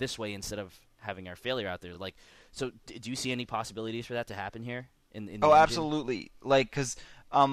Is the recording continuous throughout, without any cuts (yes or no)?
yes